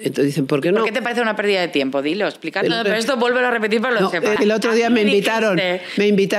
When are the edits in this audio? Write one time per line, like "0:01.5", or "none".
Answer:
0:02.6
0:04.4